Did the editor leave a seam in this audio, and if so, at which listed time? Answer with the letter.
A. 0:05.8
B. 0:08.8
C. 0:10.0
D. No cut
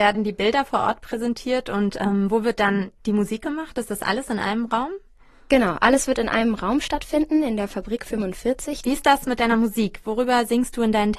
B